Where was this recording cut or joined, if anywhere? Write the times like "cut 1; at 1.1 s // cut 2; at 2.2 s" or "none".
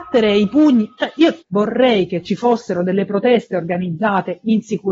cut 1; at 1.4 s